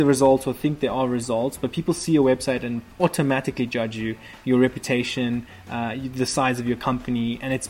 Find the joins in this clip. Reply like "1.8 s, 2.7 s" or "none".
2.9 s